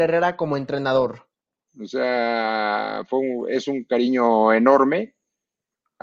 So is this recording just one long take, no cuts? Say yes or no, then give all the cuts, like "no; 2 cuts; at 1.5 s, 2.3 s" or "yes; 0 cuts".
no; 1 cut; at 1.7 s